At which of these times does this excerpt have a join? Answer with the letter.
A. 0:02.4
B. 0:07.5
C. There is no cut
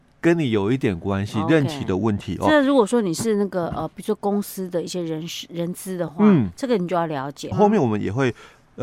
B